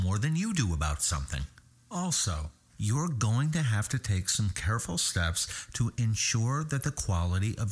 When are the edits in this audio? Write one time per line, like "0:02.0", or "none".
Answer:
0:02.7